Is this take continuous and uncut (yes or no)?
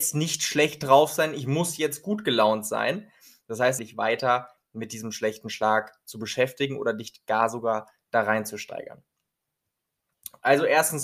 no